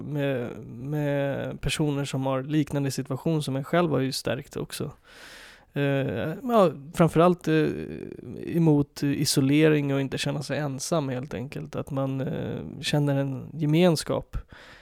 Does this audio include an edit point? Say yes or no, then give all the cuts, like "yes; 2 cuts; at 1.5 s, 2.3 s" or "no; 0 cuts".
no; 0 cuts